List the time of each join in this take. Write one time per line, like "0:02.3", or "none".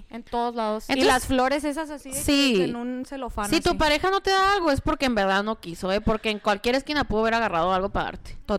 none